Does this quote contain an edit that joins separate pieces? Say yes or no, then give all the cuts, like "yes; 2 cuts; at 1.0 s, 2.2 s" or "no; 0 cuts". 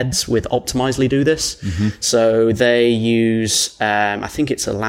no; 0 cuts